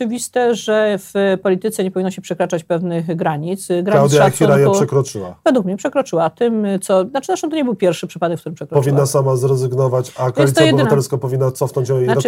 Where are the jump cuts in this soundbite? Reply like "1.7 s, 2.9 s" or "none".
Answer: none